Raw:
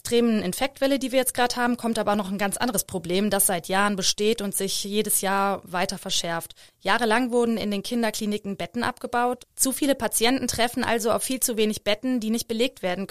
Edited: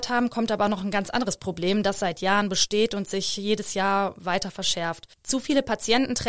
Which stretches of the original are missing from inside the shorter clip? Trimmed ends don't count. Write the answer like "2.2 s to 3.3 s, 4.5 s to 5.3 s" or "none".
6.6 s to 9.5 s